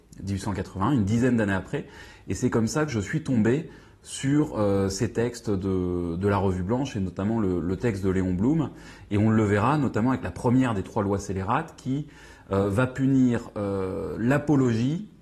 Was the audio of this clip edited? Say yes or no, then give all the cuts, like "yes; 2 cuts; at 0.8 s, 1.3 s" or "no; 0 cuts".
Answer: no; 0 cuts